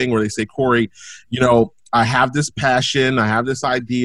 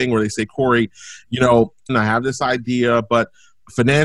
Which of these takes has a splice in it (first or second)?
second